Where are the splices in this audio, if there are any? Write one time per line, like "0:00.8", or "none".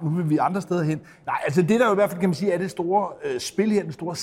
0:01.2

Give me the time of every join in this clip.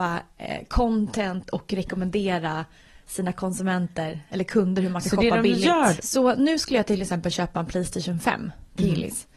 0:06.0

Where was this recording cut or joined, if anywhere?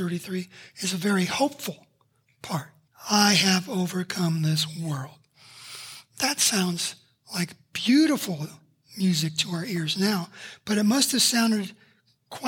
0:02.9

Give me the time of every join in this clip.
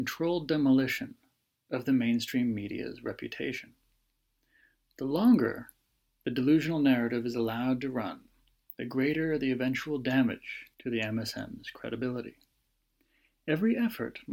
0:10.7

